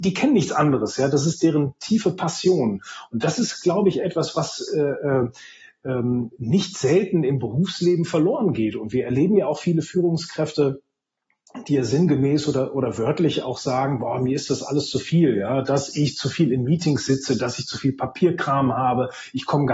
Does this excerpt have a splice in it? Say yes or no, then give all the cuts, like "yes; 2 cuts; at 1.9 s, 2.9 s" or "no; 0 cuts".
no; 0 cuts